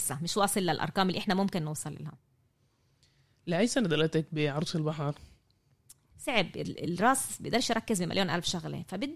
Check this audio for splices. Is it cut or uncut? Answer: cut